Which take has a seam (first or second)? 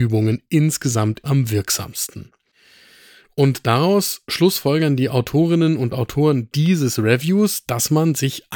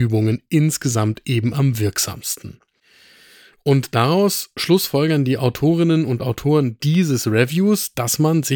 first